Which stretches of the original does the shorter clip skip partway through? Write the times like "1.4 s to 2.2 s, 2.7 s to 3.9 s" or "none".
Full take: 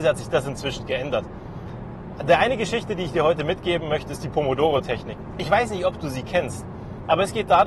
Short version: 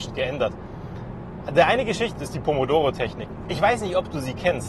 2.9 s to 4.0 s